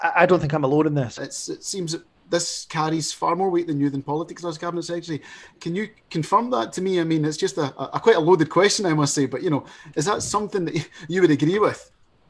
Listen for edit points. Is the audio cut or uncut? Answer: cut